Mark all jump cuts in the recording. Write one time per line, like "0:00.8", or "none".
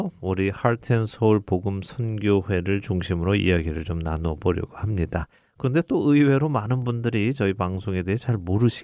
0:05.4